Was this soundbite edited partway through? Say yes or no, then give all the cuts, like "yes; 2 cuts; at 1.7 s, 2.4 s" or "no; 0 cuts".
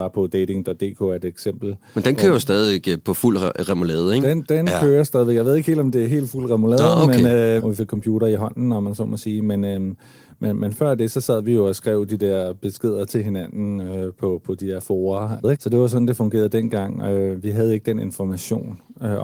yes; 2 cuts; at 7.6 s, 15.4 s